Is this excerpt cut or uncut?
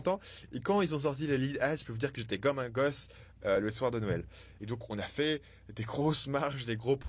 cut